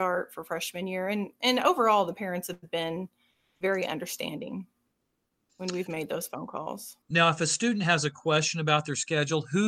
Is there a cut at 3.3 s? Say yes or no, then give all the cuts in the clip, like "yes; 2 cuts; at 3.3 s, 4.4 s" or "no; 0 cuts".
no; 1 cut; at 7.0 s